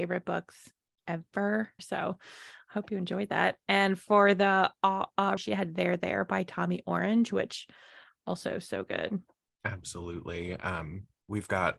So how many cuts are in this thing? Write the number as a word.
two